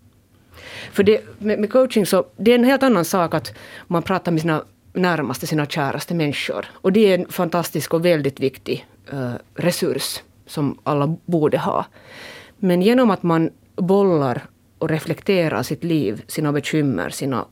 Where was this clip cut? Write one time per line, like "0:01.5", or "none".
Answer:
0:06.7